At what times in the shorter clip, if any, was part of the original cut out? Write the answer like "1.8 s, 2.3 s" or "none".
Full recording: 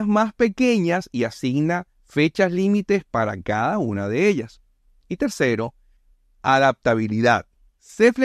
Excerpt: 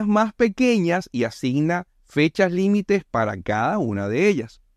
none